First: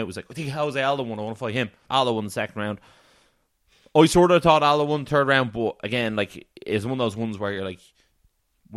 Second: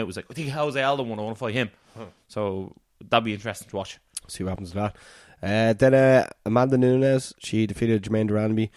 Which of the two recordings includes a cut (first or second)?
first